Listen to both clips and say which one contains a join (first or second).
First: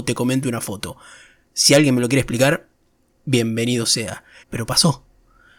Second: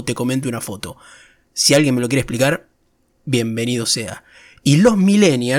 first